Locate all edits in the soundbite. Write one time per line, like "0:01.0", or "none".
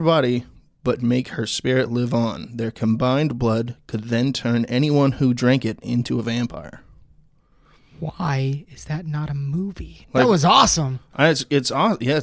0:10.0